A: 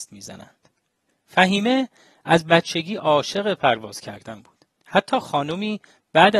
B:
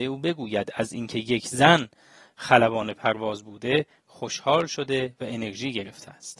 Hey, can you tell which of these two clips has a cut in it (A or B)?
A